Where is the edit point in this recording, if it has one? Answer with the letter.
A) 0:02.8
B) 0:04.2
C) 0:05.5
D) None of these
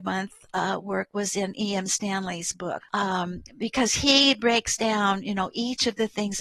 A